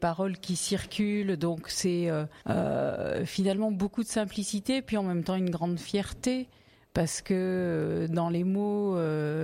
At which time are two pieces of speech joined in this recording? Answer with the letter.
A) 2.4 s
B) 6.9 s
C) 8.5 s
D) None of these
A